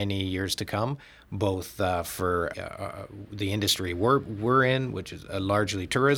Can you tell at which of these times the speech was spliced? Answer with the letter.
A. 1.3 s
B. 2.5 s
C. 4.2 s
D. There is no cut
B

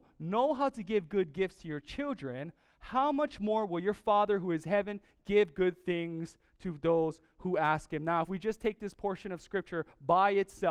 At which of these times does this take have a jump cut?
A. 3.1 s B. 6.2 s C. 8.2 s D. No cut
D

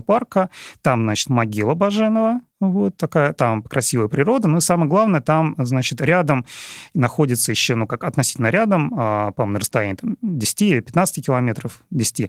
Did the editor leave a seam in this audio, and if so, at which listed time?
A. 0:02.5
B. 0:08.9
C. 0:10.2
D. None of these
A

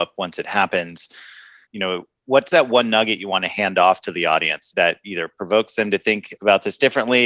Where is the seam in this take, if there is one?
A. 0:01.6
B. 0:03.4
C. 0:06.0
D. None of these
A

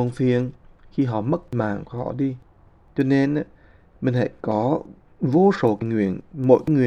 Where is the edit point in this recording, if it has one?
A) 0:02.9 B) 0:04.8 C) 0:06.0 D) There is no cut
A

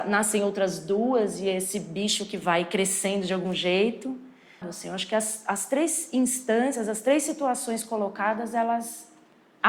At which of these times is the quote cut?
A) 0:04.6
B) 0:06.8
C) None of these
A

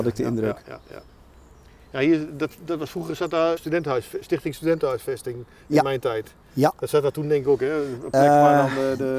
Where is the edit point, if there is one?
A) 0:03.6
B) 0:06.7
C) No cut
A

